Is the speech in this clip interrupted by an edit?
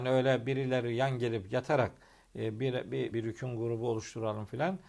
yes; 1 cut; at 3.1 s

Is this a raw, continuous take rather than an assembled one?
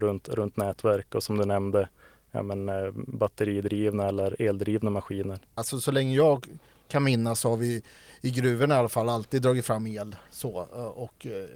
no; 1 cut; at 5.6 s

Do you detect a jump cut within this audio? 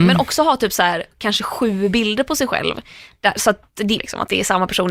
yes; 1 cut; at 4.0 s

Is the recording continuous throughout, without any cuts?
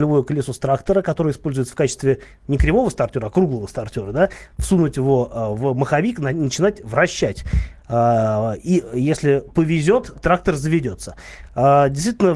yes; 0 cuts

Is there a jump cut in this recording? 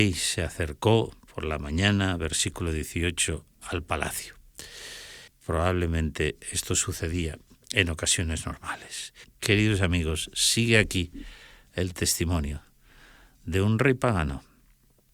yes; 2 cuts; at 5.3 s, 9.2 s

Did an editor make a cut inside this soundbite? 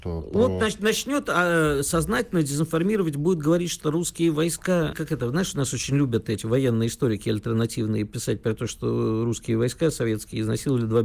yes; 2 cuts; at 3.8 s, 4.9 s

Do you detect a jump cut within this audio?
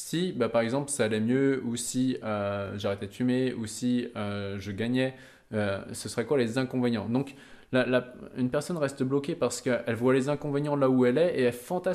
no; 0 cuts

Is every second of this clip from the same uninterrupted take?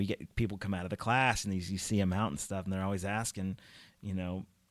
yes; 0 cuts

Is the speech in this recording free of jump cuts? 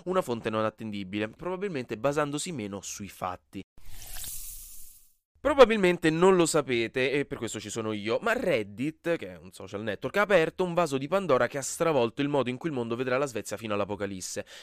no; 1 cut; at 1.4 s

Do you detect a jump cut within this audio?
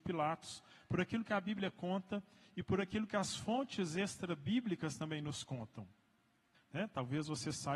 yes; 1 cut; at 6.5 s

